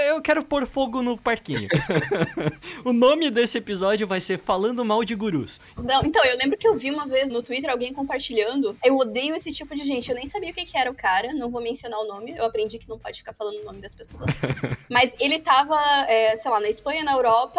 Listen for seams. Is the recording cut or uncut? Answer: cut